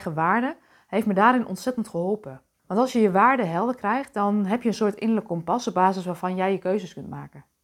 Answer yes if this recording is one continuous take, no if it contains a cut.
no